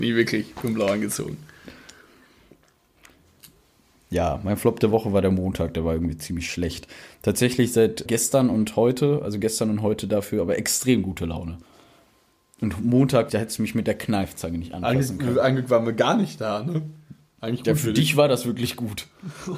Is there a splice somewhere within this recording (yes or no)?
yes